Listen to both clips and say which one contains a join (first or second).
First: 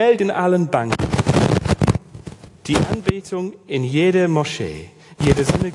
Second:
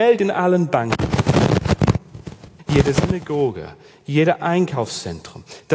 second